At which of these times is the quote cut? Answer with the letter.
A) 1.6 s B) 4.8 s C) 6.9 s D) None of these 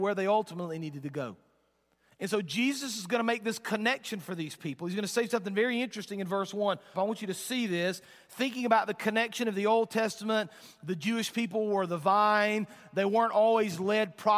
C